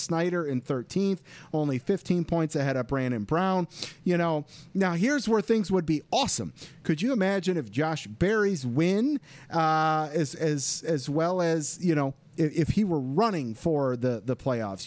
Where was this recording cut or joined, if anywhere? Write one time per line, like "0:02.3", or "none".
none